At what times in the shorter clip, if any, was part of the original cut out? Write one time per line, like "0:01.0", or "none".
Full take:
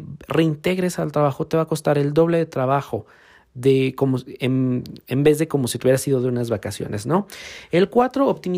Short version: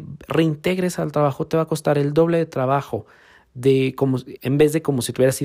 0:04.4